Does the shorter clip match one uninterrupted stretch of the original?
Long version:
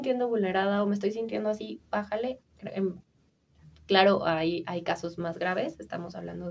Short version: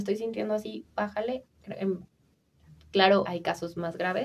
no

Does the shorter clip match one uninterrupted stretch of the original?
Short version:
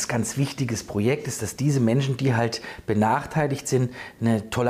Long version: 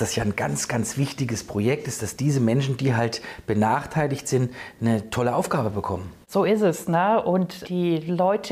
yes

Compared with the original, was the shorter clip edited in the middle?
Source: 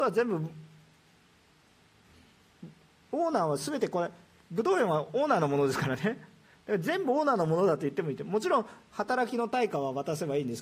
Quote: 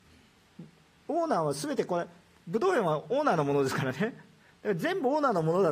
no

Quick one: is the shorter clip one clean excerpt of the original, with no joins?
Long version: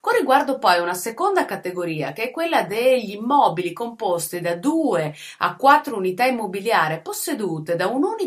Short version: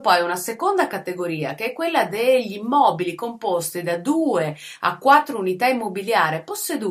yes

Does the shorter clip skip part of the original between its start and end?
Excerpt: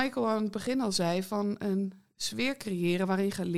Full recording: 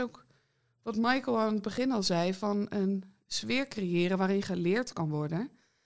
no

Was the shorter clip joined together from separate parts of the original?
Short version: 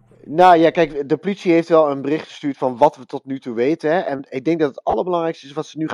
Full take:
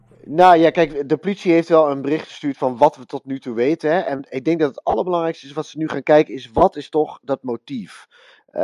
no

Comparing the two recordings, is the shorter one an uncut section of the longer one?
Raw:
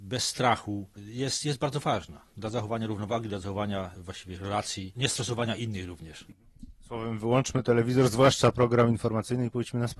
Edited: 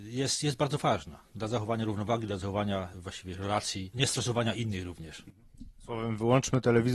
yes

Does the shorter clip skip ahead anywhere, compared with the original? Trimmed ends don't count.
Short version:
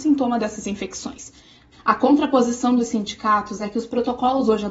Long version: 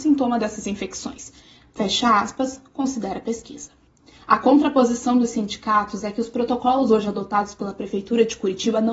yes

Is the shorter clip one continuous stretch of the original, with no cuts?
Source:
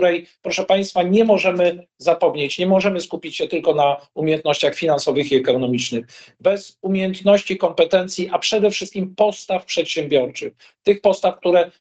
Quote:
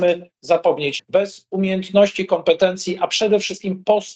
no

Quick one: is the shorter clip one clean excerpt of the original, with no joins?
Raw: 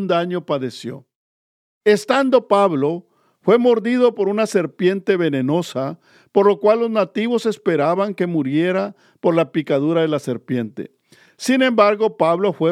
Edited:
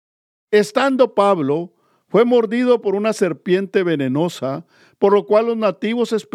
yes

